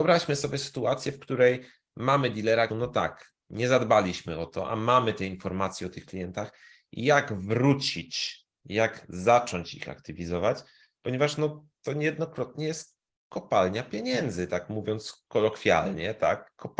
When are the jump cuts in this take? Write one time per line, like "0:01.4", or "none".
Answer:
0:02.7